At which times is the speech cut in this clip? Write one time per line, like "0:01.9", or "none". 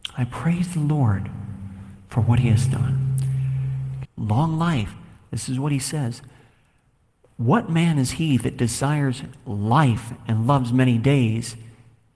0:04.0